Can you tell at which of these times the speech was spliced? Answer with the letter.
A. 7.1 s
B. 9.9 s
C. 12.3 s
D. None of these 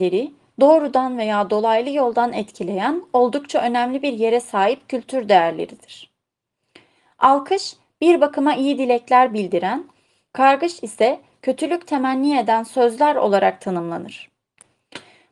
D